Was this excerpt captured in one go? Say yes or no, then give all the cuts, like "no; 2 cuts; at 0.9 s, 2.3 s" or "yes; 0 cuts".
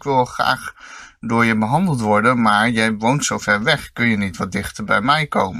yes; 0 cuts